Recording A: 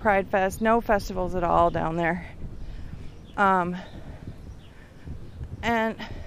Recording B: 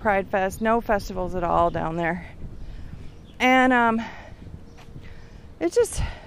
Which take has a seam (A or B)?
A